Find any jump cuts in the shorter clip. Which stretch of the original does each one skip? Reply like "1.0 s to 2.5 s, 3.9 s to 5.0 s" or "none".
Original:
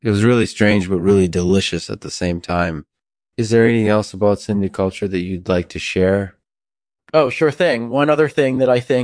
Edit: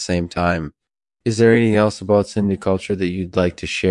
none